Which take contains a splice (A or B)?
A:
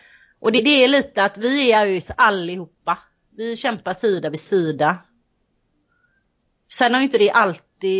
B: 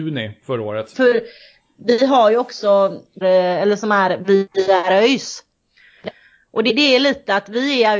B